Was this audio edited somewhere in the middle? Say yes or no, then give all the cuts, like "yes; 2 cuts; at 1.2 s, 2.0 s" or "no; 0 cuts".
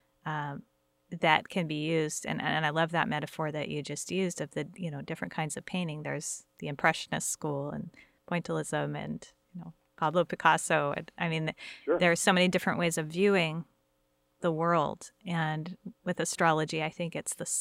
no; 0 cuts